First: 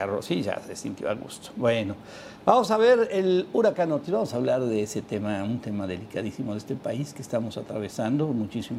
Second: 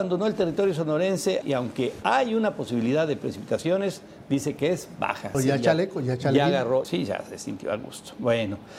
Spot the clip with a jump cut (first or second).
second